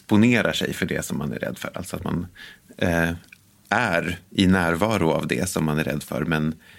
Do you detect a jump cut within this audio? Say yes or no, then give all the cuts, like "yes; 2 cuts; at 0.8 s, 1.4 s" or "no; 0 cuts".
no; 0 cuts